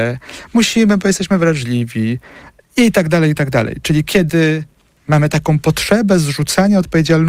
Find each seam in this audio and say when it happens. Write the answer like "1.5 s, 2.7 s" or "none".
none